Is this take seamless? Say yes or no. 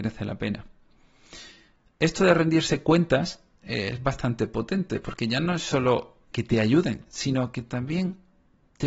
no